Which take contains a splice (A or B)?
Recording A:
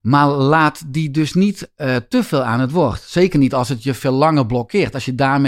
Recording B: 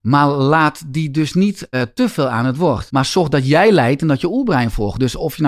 B